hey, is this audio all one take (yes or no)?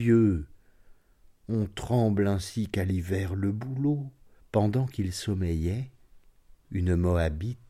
no